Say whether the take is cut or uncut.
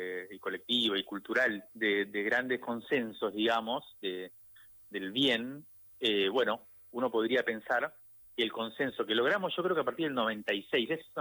cut